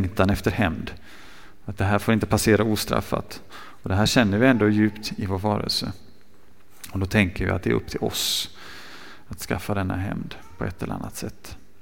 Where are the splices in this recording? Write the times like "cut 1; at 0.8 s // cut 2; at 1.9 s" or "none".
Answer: none